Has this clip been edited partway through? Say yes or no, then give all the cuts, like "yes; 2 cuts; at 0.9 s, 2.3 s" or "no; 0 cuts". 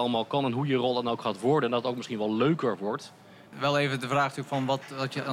yes; 1 cut; at 3.5 s